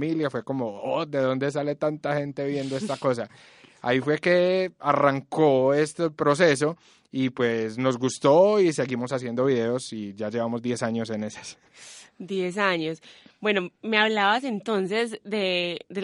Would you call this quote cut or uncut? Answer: uncut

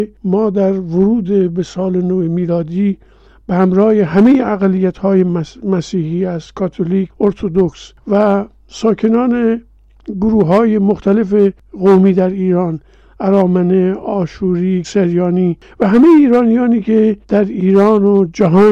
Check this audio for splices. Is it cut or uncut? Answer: cut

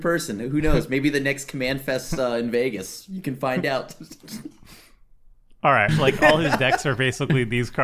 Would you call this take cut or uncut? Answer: cut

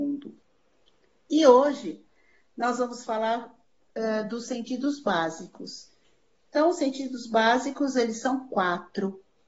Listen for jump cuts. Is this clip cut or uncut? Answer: uncut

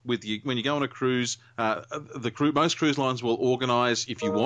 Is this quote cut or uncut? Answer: uncut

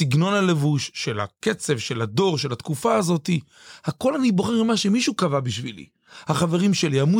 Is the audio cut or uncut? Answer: uncut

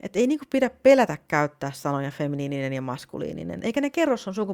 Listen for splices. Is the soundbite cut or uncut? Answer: cut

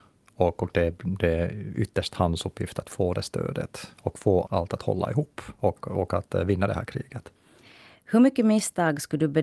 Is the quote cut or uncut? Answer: cut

